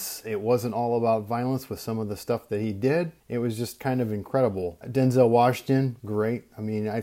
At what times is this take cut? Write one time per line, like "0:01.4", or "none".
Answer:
0:03.2
0:04.8
0:06.0